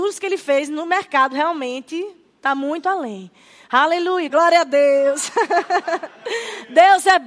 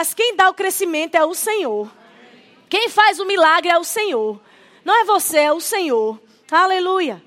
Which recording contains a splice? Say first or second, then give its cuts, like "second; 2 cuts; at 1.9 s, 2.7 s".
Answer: first; 1 cut; at 4.3 s